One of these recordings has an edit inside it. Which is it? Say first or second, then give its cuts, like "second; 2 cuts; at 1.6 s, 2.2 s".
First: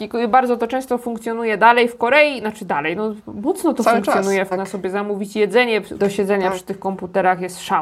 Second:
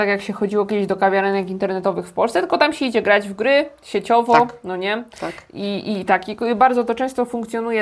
first; 2 cuts; at 4.5 s, 6.0 s